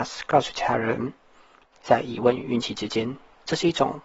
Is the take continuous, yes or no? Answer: no